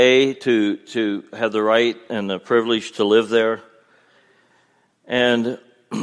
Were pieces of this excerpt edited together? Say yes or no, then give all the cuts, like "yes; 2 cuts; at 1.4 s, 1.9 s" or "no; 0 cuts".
no; 0 cuts